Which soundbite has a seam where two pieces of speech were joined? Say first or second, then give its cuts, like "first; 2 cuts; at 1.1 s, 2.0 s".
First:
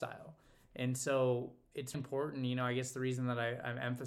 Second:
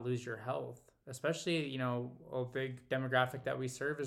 first; 1 cut; at 1.9 s